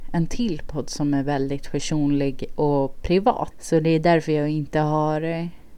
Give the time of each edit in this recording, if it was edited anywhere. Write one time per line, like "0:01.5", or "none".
0:03.5